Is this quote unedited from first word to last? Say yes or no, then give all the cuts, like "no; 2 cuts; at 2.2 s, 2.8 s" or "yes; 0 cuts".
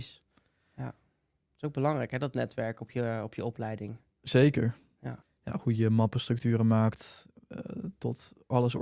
no; 1 cut; at 5.2 s